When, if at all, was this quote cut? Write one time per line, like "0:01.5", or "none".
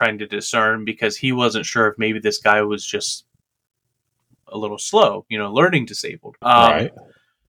0:06.4